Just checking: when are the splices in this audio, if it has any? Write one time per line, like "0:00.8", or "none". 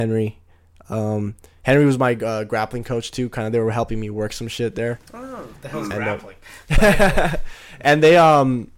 none